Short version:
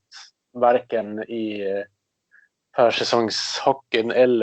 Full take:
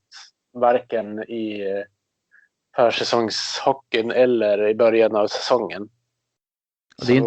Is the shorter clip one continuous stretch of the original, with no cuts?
yes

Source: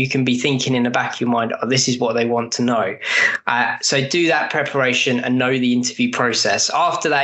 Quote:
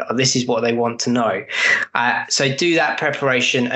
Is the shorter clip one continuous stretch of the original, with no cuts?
yes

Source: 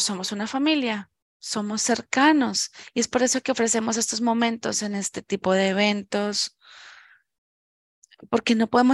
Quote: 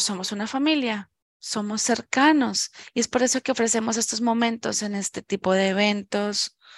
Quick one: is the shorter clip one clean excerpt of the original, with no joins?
yes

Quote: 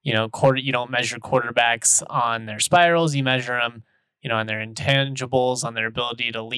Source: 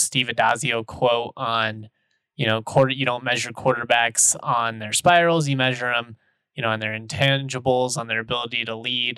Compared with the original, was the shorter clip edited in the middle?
no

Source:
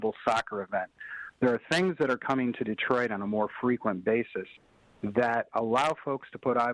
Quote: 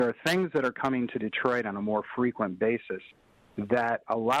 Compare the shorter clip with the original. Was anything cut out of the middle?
no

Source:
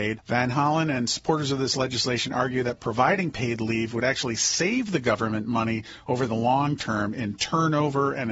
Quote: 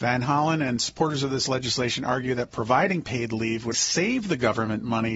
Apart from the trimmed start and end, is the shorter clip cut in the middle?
yes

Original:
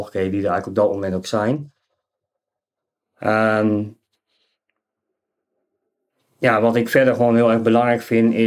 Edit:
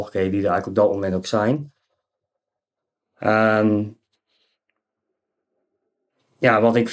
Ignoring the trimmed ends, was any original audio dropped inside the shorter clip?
no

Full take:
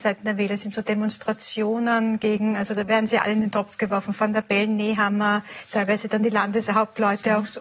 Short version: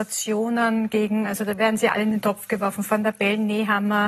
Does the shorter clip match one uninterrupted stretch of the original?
yes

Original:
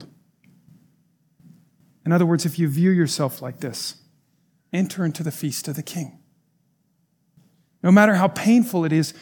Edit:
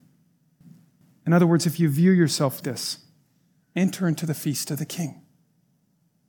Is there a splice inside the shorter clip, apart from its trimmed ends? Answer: yes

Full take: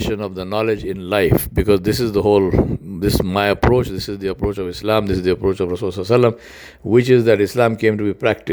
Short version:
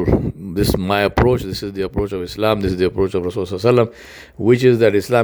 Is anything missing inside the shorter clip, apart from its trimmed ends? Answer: no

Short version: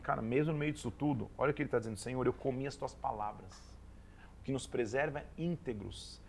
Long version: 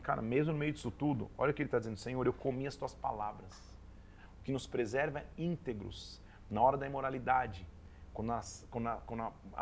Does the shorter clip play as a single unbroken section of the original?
yes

